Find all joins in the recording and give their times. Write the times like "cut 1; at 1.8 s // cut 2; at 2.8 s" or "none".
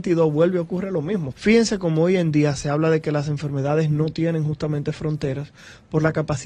cut 1; at 1.3 s